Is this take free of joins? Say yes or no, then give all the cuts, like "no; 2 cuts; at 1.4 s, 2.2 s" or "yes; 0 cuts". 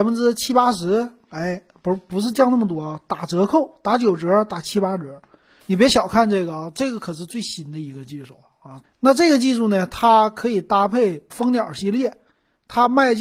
no; 3 cuts; at 5.6 s, 8.8 s, 11.3 s